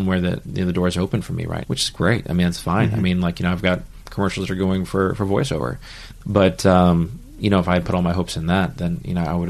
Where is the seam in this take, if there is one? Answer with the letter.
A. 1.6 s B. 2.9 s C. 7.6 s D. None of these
A